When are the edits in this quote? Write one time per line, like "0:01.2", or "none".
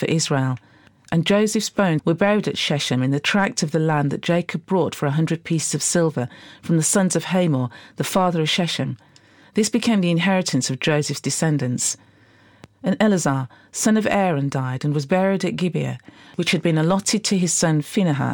0:02.0